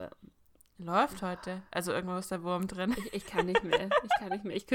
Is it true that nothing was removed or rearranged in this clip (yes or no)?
yes